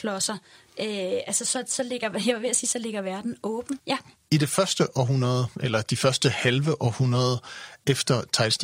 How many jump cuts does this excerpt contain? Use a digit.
1